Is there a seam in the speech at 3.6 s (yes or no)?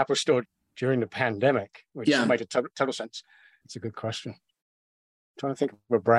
yes